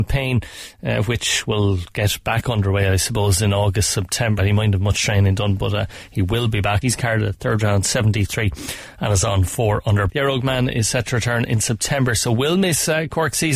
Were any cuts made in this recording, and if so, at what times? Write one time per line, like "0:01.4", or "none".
0:04.4
0:06.8
0:10.1